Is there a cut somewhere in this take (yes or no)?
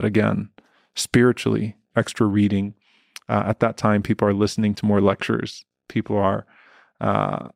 yes